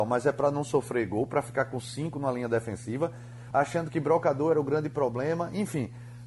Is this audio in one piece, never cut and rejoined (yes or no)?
no